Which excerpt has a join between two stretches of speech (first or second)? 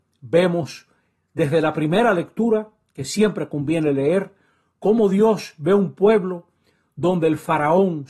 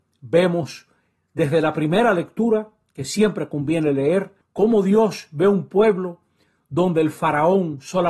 second